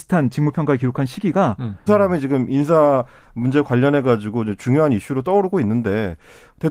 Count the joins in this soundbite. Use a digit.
1